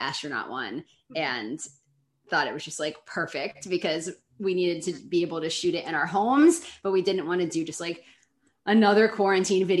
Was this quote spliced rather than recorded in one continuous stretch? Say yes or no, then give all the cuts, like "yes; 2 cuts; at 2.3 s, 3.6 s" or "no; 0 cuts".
no; 0 cuts